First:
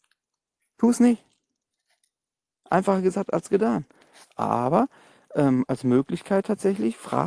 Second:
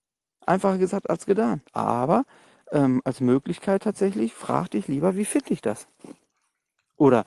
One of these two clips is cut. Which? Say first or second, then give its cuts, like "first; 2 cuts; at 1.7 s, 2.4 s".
second; 1 cut; at 1.7 s